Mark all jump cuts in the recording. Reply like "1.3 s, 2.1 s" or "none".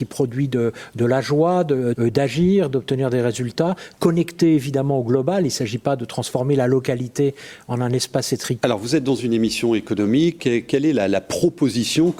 1.9 s, 8.6 s, 10.4 s

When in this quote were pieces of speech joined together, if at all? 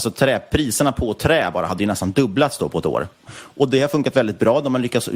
3.2 s

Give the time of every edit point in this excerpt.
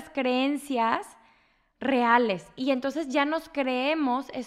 none

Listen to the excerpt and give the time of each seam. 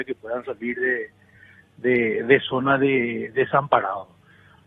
none

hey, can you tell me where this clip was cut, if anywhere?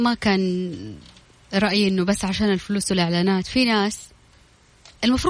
none

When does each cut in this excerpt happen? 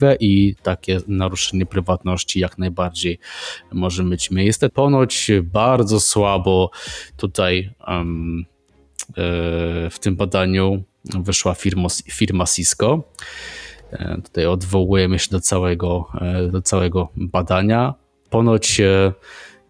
4.7 s

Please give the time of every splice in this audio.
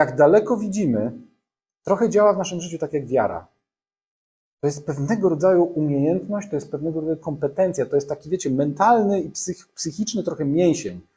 none

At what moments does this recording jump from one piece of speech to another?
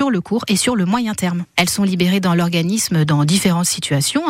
1.5 s

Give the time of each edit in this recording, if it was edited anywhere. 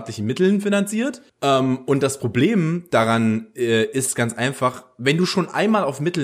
1.3 s

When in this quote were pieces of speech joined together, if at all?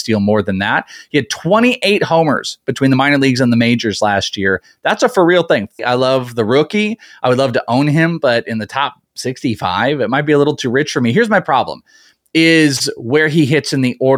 5.8 s

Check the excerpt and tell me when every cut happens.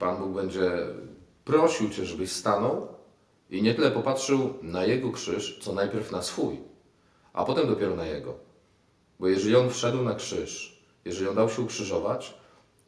none

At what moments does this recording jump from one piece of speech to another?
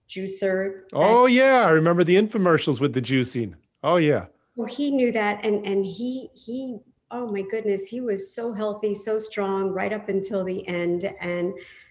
none

